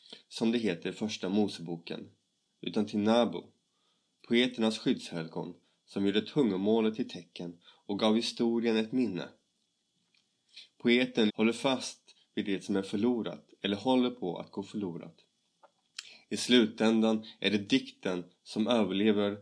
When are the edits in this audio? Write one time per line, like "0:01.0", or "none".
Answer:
0:11.3